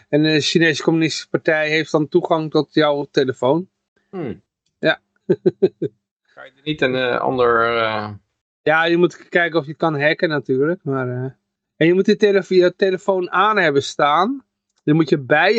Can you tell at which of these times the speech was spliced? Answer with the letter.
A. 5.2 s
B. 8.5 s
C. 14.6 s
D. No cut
A